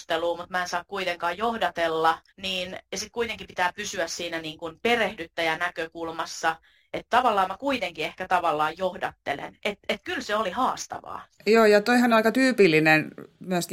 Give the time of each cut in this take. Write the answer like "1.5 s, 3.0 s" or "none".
2.3 s, 11.4 s